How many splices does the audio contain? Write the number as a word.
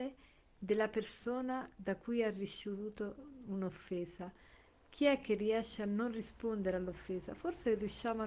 zero